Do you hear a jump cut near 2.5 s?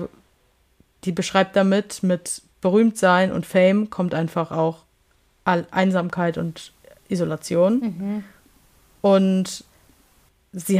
yes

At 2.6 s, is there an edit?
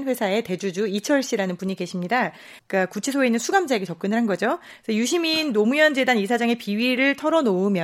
yes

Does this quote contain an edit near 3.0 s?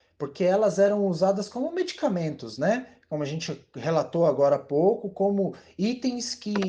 no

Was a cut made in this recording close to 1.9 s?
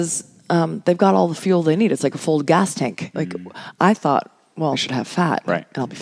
no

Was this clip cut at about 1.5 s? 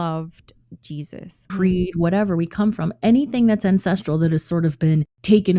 yes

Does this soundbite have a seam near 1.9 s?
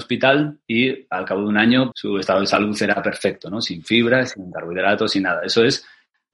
yes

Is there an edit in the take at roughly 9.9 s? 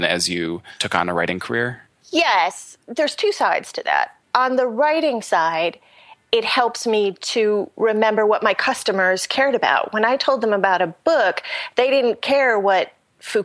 no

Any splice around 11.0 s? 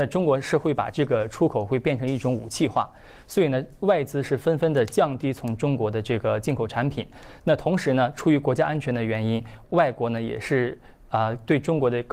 no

